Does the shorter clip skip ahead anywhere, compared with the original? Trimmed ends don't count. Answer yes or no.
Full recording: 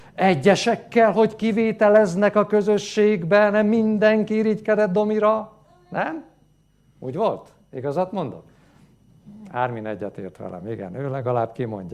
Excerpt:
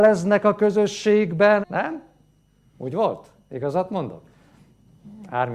yes